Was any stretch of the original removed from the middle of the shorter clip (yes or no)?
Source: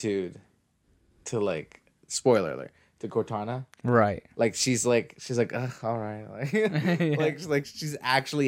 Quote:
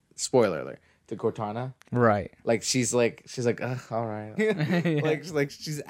yes